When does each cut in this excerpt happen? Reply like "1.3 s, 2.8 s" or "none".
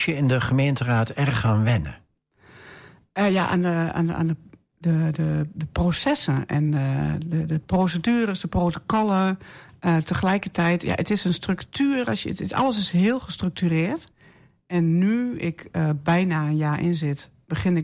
none